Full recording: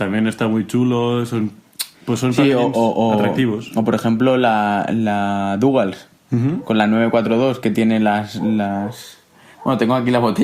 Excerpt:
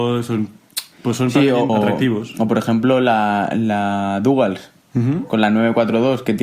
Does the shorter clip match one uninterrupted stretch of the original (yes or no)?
no